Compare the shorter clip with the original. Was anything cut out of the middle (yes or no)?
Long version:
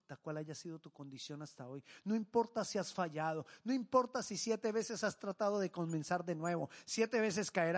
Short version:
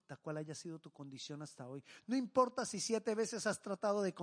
yes